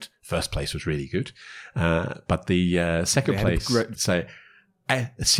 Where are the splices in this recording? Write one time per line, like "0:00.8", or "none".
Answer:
0:03.9